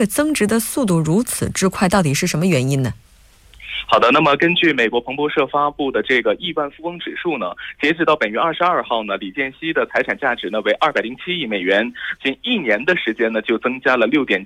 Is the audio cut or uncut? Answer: cut